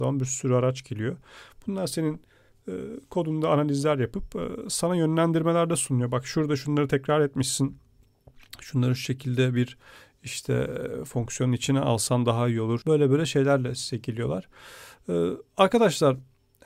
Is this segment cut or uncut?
cut